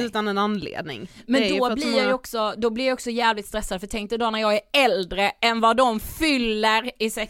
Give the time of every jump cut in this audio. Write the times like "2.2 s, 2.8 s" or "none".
none